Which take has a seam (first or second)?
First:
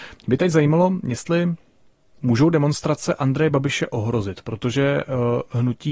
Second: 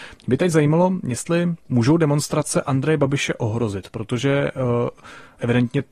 second